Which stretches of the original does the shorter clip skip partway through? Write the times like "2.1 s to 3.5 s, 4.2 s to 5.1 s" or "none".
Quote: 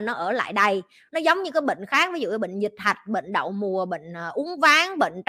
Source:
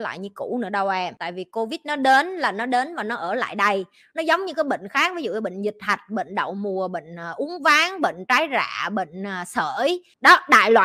none